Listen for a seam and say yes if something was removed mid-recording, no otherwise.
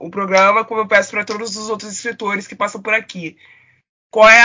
no